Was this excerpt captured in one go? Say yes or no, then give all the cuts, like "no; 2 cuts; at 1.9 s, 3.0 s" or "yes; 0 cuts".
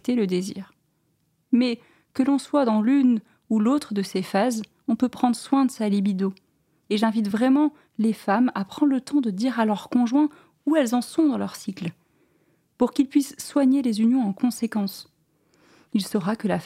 yes; 0 cuts